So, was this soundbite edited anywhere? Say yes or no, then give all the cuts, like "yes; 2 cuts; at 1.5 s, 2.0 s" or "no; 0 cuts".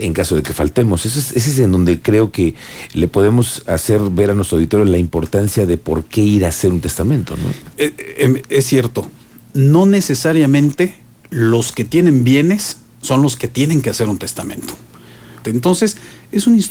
yes; 2 cuts; at 7.7 s, 15.4 s